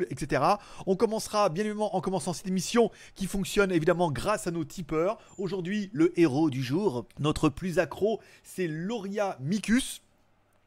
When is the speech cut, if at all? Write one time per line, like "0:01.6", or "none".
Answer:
0:07.1